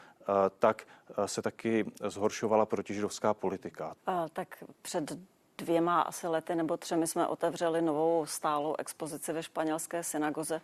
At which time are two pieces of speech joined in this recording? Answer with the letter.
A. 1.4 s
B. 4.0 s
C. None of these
B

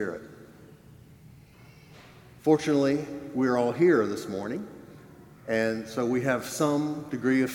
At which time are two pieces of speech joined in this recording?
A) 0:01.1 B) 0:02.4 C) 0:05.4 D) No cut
D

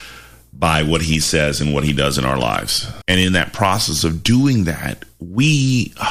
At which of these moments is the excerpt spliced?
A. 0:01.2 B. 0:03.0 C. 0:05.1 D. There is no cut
B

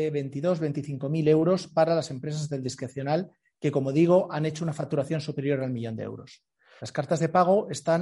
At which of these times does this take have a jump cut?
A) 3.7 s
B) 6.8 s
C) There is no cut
B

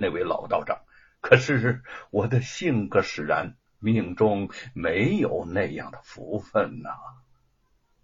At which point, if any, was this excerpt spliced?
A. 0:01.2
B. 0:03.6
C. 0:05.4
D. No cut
A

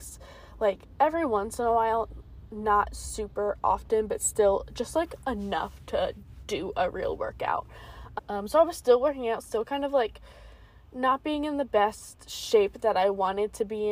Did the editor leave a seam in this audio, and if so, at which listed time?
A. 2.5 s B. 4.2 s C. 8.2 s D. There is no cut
C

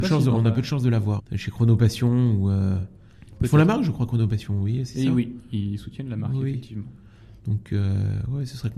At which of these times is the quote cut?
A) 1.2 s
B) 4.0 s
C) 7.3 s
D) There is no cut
A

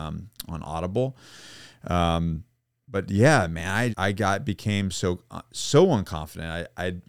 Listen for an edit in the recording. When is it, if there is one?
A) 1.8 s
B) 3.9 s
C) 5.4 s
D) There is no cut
B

